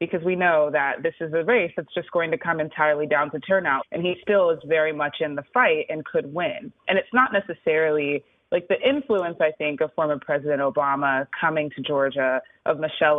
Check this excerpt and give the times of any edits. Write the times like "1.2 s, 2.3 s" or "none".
3.8 s, 6.8 s